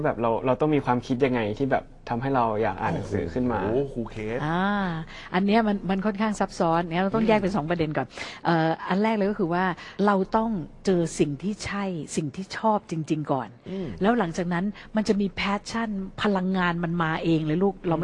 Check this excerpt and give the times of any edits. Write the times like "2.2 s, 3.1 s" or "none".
10.0 s

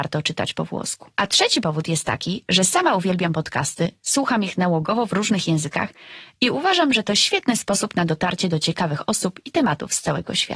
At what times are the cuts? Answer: 1.1 s

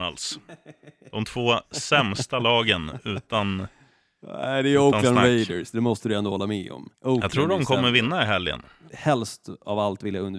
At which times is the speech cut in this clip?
6.9 s, 8.9 s

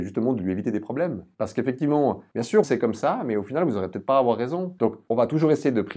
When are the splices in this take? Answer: 2.6 s, 4.8 s

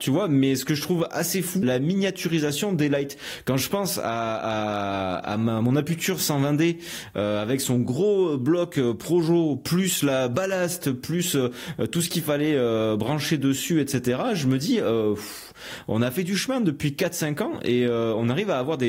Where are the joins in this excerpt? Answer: 1.6 s

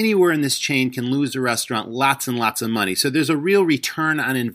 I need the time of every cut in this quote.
none

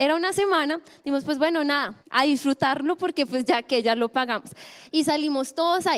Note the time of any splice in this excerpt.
2.0 s, 4.9 s

